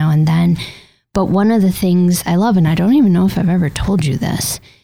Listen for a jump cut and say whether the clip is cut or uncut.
uncut